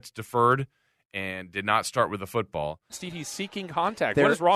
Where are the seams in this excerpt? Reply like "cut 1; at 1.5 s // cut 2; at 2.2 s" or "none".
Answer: cut 1; at 2.9 s